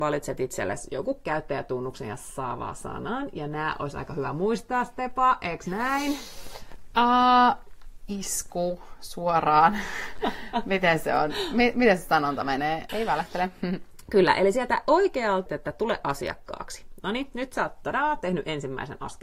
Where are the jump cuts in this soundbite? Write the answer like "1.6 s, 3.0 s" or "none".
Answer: 12.9 s, 15.5 s

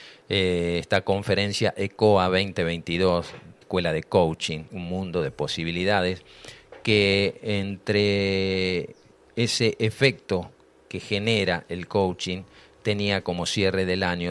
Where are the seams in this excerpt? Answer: 3.6 s, 4.7 s

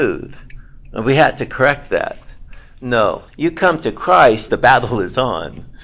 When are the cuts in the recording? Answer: 3.3 s, 4.5 s

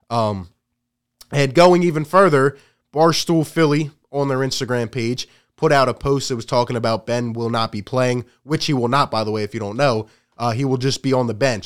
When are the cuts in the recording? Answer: none

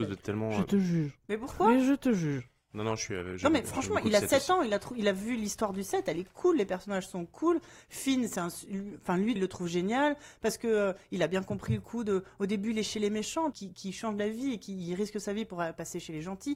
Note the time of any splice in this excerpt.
9.4 s, 13.5 s

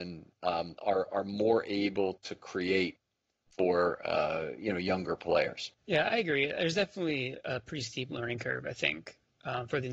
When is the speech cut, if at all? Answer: 5.8 s

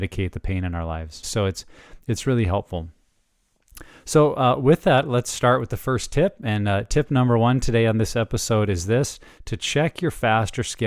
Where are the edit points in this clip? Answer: 1.2 s

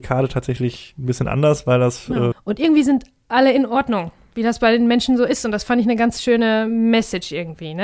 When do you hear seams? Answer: 2.3 s

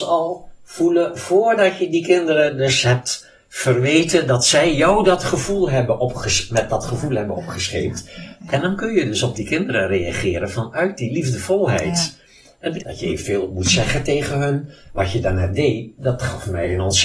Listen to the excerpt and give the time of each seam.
12.8 s

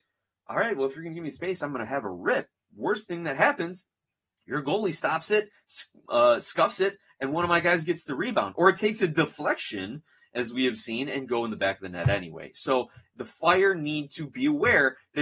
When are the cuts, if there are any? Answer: none

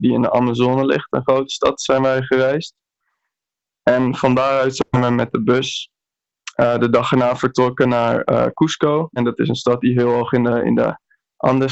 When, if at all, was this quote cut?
9.2 s

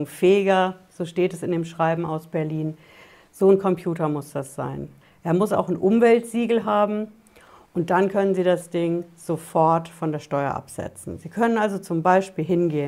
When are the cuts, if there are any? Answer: none

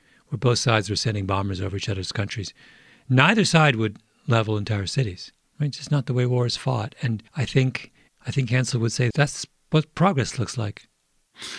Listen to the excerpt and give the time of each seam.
5.4 s, 7.3 s, 9.1 s

